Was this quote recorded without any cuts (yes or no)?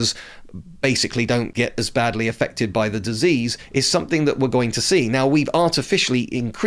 yes